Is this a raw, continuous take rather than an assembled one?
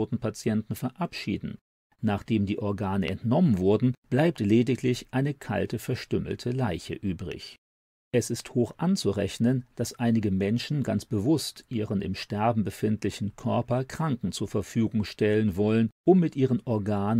no; 1 cut; at 1.9 s

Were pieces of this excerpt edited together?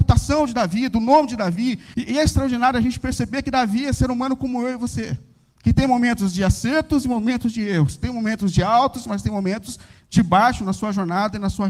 yes; 1 cut; at 1.9 s

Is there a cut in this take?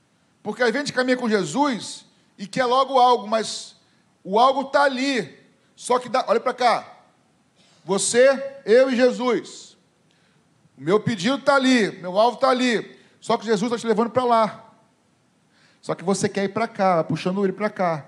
no; 0 cuts

